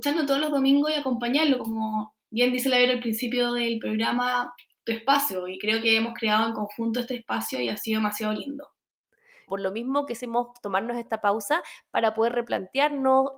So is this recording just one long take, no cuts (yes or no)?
no